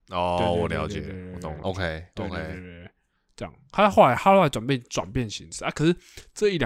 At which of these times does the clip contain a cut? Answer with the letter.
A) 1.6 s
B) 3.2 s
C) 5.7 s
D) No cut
A